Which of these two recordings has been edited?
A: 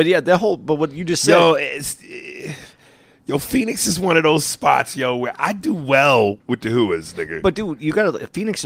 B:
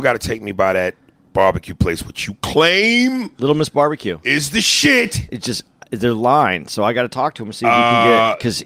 A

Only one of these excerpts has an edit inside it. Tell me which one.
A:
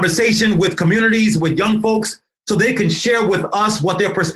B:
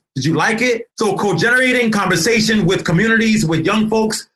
B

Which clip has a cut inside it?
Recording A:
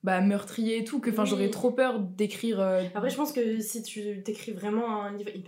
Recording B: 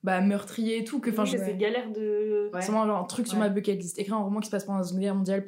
B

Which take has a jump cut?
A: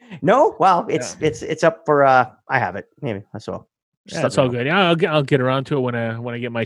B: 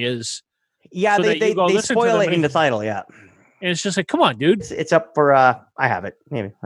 B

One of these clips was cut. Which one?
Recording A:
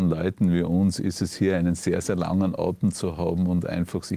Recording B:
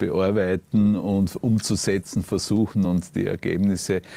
B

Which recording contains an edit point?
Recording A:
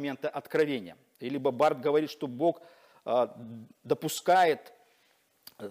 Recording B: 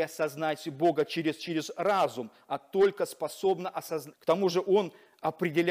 B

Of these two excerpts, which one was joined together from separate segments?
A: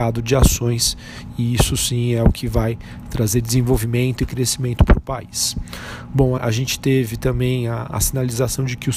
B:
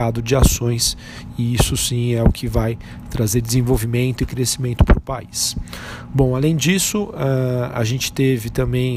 A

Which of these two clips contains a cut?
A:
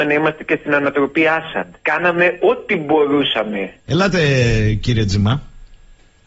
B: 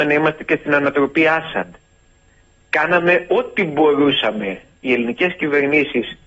A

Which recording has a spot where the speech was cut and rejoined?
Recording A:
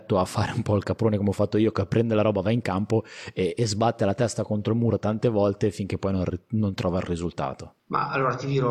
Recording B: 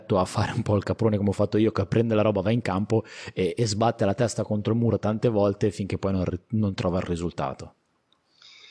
A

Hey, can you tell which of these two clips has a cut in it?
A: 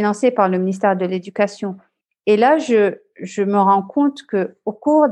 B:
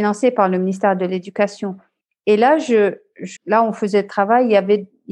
B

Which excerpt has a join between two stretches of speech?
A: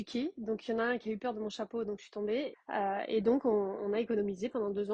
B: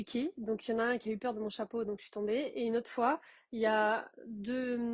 A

